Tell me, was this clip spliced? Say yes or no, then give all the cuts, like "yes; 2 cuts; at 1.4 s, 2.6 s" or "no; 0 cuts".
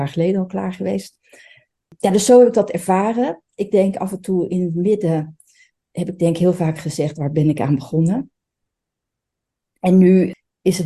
no; 0 cuts